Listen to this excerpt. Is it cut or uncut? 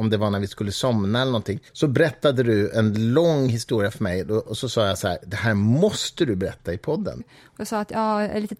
cut